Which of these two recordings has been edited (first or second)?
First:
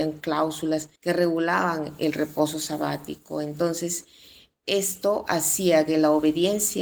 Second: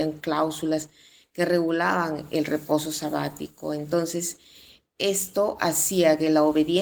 first